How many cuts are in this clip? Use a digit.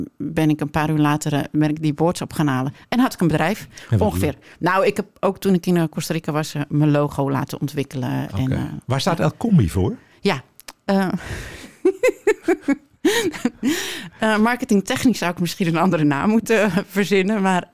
0